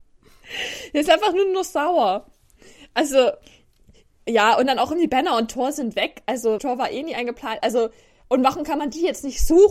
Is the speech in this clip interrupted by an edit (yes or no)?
yes